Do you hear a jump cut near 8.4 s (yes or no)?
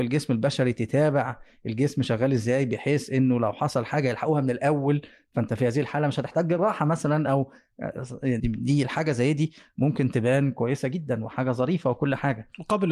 yes